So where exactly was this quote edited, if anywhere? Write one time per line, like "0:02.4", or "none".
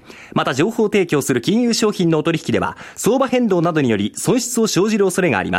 none

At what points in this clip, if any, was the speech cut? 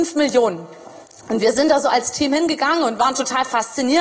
none

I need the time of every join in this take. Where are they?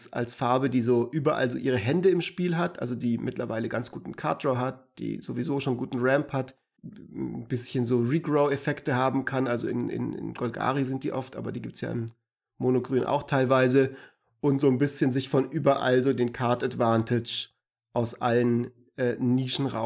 0:06.8

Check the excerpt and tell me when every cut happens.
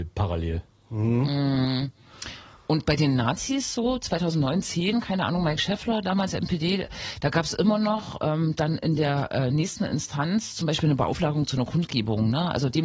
none

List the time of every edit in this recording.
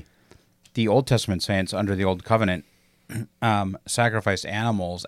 none

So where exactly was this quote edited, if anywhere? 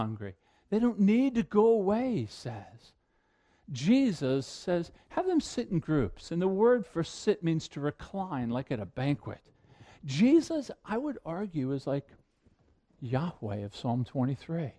none

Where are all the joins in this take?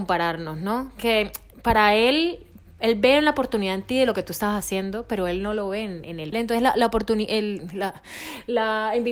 0:06.3

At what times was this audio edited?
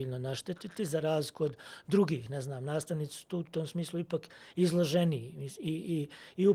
none

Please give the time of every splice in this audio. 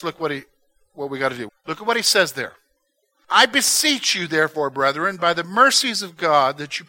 0:01.5

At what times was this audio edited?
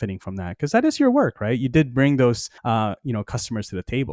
0:02.6

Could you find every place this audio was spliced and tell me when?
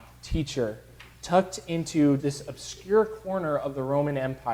0:02.2

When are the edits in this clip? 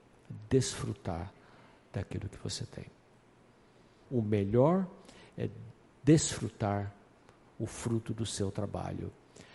0:04.0

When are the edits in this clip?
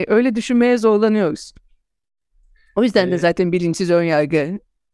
none

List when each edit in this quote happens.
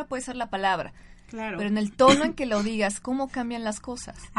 0:03.0

